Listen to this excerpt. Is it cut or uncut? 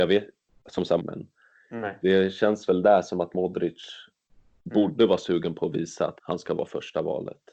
cut